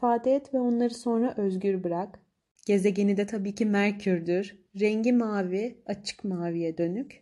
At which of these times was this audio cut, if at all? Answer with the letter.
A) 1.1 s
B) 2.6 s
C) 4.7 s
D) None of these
B